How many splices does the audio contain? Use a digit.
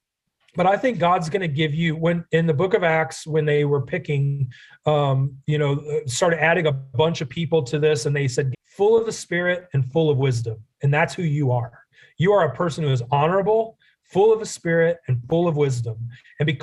2